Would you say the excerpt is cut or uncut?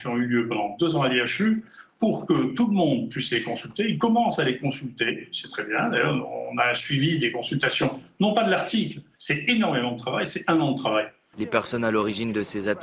cut